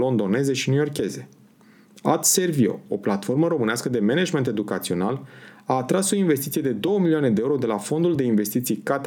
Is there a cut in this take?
no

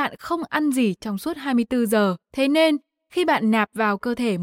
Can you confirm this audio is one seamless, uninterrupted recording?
no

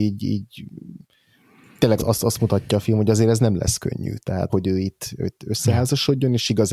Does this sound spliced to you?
yes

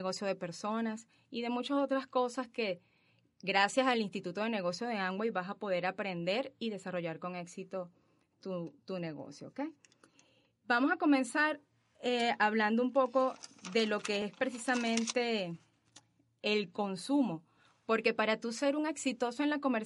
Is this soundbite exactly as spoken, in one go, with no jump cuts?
yes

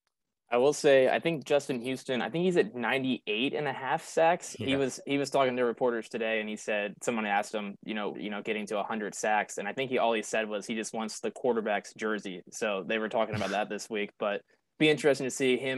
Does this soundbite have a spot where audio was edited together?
yes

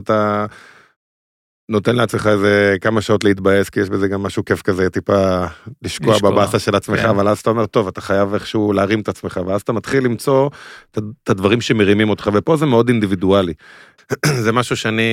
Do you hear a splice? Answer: yes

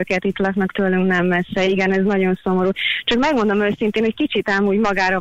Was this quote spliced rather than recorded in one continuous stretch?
no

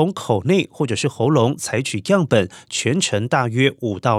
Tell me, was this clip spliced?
no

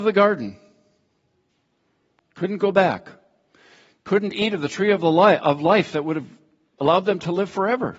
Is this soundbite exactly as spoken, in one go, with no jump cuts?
yes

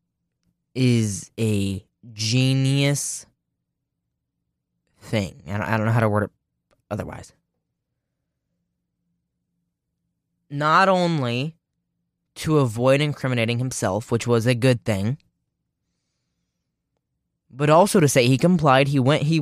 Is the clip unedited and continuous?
yes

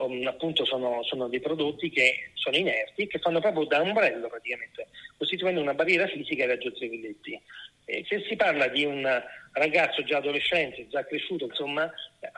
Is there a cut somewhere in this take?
yes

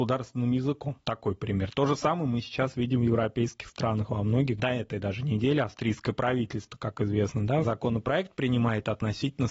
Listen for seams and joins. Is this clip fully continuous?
no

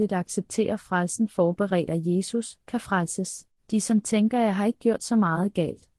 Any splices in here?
no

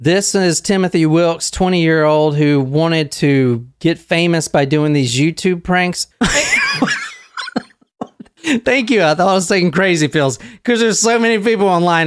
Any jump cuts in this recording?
yes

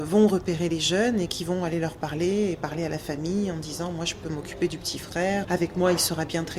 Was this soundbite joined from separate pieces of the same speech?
yes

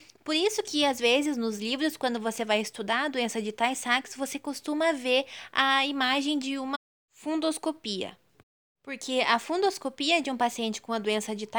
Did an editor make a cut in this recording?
no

